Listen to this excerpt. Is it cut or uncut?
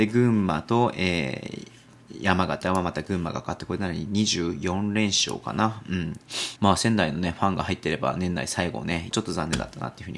cut